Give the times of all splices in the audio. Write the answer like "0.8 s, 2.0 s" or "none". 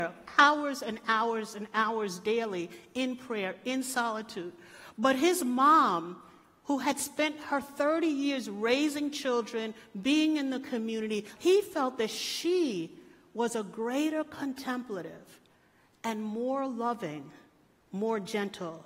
11.4 s